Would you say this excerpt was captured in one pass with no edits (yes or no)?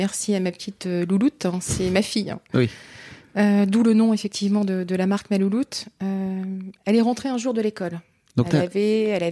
yes